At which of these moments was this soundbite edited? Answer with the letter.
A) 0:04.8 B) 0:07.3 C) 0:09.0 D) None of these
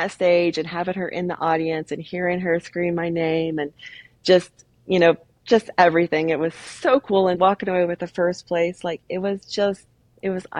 B